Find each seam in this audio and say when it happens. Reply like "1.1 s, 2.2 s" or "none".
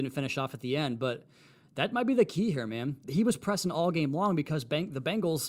3.0 s